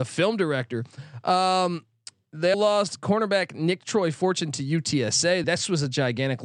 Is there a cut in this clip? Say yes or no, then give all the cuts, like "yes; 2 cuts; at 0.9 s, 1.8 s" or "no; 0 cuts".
yes; 2 cuts; at 2.5 s, 5.4 s